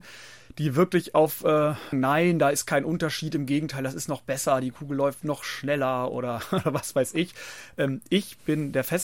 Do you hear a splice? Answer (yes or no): yes